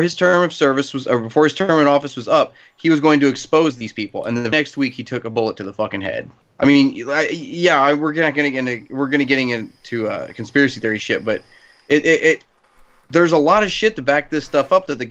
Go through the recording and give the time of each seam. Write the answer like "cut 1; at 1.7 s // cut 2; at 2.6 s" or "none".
cut 1; at 4.5 s // cut 2; at 6.4 s